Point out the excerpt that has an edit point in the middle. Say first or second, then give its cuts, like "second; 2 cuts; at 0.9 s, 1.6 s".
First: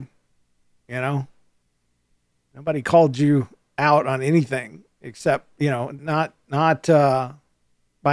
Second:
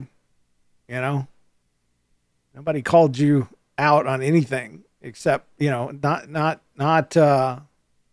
first; 1 cut; at 6.0 s